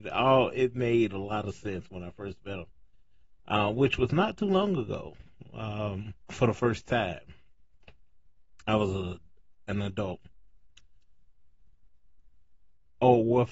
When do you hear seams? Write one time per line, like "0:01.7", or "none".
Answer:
0:06.2

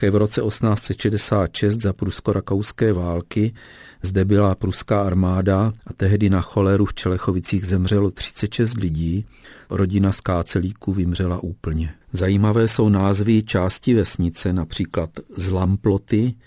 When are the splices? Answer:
0:12.0

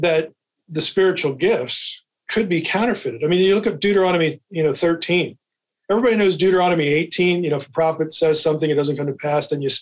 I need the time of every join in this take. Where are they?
none

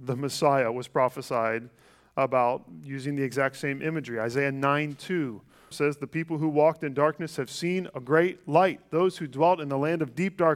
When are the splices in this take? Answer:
0:05.7

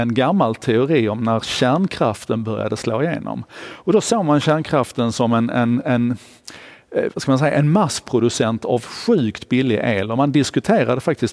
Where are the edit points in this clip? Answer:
none

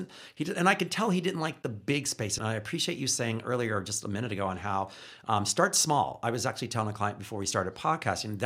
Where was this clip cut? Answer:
0:02.4

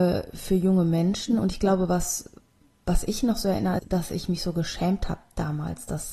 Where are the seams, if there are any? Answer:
0:03.8

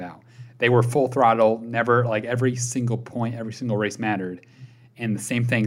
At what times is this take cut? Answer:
none

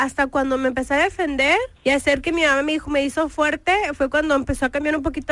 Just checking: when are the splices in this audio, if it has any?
0:01.8

